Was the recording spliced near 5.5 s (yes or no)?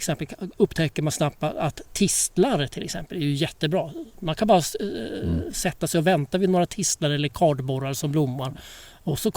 no